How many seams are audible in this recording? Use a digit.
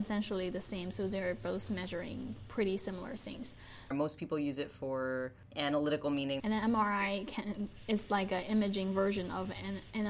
2